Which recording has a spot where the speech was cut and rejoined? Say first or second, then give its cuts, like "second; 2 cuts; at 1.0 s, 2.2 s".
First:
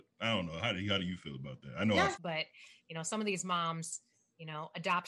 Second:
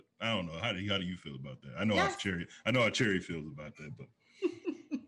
first; 1 cut; at 2.2 s